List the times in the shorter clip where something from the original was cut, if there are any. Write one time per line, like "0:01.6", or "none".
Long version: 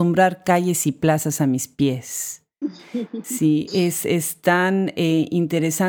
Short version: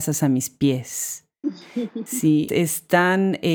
0:02.5